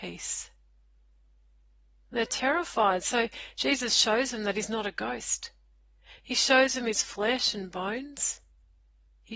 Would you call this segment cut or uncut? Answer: uncut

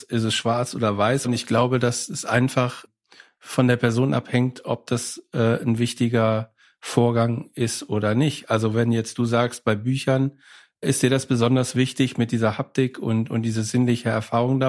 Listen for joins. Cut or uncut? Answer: cut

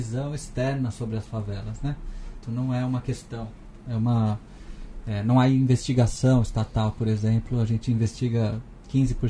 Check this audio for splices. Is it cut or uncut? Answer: cut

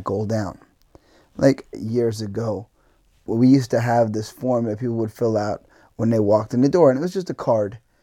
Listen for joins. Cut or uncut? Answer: cut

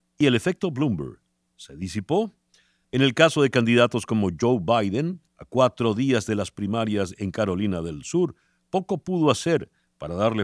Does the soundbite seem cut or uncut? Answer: cut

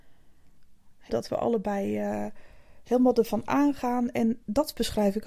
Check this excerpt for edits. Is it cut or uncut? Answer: cut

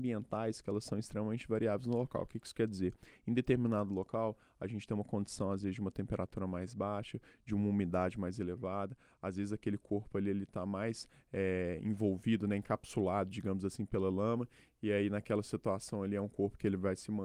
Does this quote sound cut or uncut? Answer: uncut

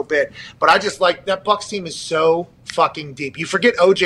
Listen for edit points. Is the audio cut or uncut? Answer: uncut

